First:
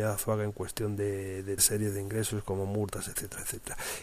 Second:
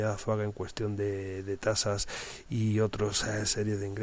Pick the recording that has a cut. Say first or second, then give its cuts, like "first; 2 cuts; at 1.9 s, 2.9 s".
first; 1 cut; at 1.6 s